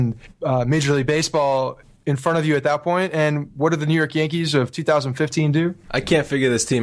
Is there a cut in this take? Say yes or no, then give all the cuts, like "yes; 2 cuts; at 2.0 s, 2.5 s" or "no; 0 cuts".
yes; 1 cut; at 5.8 s